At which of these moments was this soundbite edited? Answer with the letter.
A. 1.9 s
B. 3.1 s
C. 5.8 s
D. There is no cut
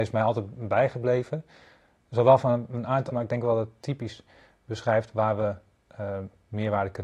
B